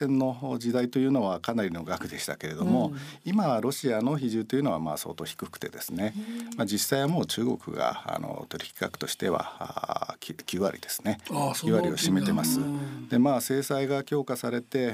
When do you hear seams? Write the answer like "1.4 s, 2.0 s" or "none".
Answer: none